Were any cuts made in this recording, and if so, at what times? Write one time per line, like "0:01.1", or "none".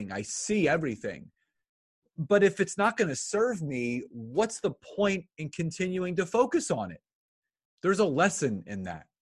0:07.6